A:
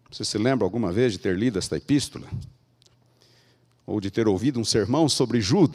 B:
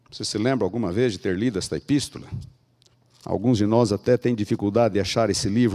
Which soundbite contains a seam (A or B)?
B